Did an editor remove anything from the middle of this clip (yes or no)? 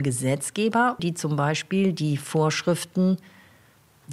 yes